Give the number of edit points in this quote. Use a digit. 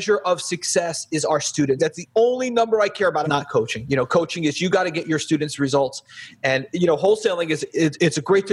2